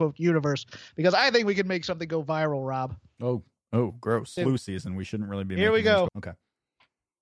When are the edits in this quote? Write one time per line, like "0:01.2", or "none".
0:04.4
0:06.1